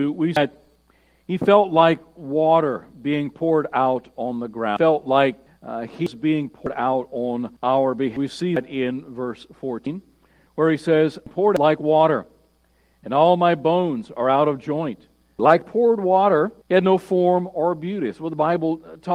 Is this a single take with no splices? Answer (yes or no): no